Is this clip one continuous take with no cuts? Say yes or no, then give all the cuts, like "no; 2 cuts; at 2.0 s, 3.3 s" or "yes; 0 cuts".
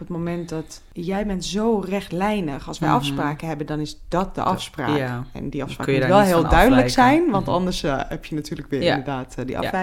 yes; 0 cuts